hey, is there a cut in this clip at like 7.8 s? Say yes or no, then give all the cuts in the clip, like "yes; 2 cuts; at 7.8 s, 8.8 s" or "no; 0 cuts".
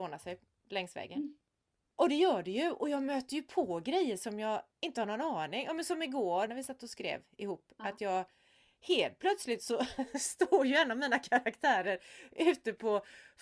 no; 2 cuts; at 1.8 s, 6.5 s